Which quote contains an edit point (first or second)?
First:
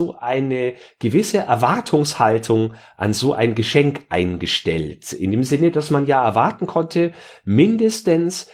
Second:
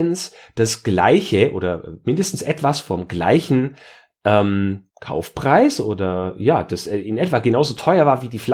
second